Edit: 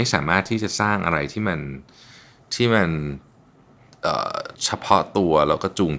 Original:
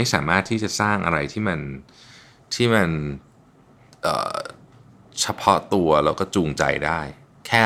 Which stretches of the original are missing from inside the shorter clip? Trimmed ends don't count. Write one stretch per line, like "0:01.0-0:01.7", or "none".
0:04.6-0:05.1

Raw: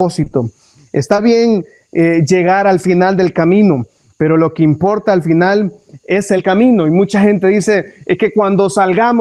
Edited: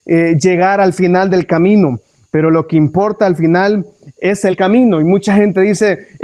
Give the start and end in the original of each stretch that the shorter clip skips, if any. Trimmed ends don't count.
none

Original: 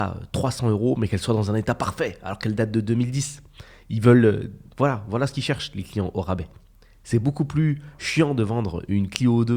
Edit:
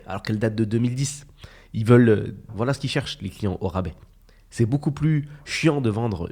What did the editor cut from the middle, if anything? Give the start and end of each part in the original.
0:04.6-0:05.0

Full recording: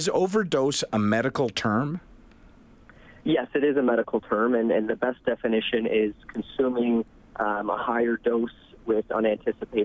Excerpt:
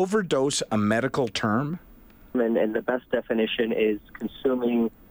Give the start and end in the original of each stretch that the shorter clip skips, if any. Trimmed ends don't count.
0:02.6-0:04.5

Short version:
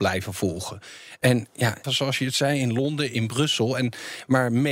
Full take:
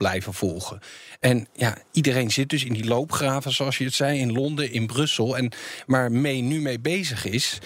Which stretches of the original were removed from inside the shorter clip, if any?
0:01.8-0:03.4

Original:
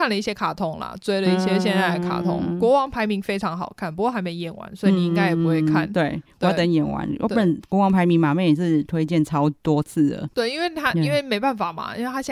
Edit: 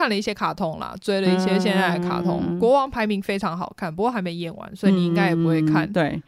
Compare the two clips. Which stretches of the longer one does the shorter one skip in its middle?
none

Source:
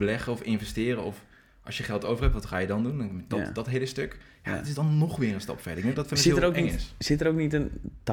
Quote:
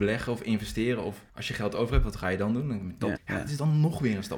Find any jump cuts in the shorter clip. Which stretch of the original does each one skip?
0:01.3-0:01.6
0:03.5-0:04.3

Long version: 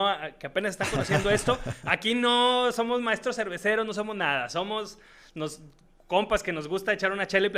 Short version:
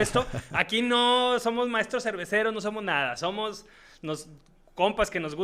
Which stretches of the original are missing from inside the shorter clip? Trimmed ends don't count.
none

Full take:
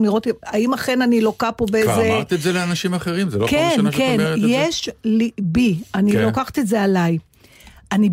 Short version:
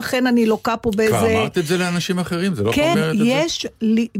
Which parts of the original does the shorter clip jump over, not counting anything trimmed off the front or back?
0:03.7-0:04.2

